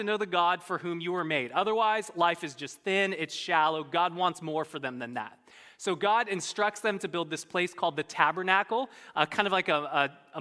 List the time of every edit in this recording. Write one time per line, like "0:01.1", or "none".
none